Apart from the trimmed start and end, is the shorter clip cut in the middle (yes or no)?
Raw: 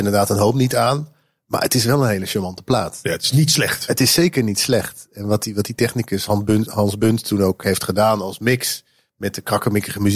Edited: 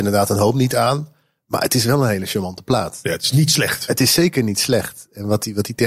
no